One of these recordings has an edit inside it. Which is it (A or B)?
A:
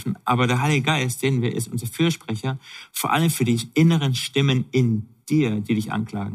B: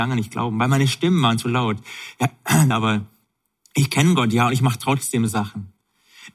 B